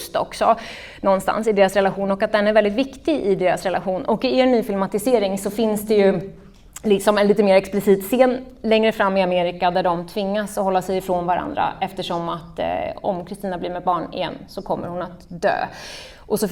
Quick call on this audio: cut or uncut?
uncut